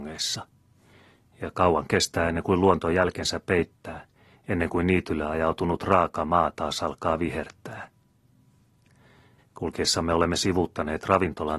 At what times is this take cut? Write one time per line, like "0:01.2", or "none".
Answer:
0:09.4